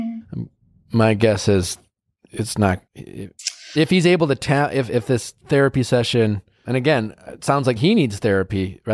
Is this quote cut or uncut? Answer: cut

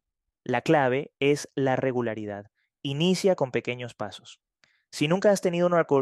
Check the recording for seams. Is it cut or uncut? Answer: uncut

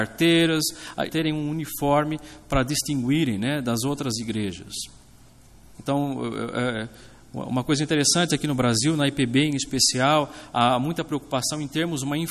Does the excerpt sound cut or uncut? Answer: cut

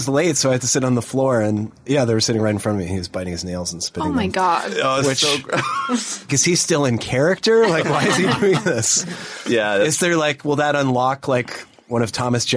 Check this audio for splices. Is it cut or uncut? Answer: cut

